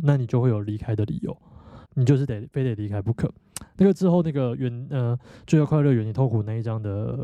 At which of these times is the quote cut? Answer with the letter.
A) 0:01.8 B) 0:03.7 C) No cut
A